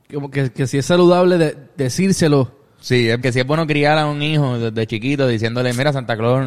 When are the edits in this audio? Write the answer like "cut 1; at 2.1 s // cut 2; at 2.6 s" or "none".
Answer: cut 1; at 3.2 s